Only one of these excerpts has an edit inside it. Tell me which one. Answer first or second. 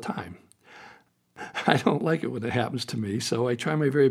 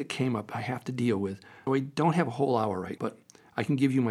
second